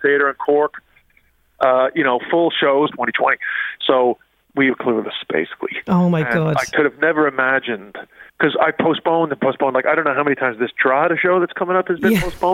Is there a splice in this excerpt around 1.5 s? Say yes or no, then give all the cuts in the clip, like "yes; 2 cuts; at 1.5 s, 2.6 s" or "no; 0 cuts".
no; 2 cuts; at 2.9 s, 8.3 s